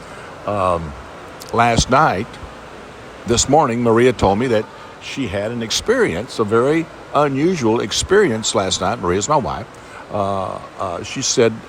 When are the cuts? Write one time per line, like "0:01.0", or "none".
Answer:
0:03.3